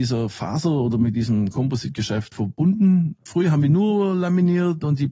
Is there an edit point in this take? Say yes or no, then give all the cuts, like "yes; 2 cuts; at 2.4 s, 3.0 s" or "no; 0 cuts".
no; 0 cuts